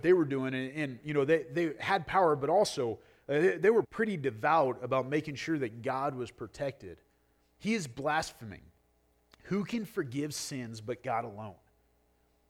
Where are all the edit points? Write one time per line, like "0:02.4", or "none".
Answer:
0:03.8
0:07.5